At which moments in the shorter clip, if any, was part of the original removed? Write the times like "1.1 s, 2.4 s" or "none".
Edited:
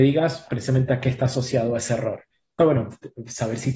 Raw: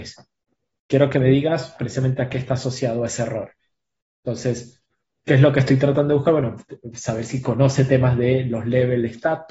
2.6 s